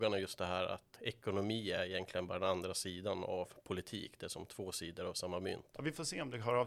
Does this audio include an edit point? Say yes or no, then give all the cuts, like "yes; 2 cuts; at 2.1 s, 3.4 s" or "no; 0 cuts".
yes; 2 cuts; at 0.9 s, 5.7 s